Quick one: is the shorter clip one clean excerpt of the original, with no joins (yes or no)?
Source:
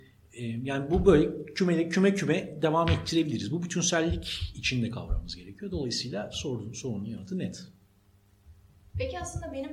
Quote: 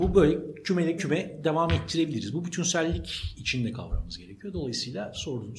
no